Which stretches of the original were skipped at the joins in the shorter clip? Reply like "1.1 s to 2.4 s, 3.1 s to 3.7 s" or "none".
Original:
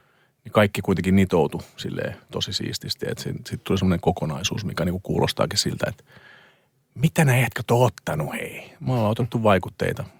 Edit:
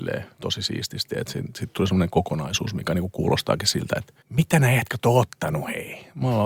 6.1 s to 6.8 s